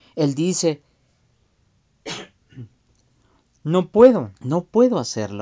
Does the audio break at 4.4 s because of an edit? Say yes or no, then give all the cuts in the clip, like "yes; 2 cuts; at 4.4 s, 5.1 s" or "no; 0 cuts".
yes; 1 cut; at 4.4 s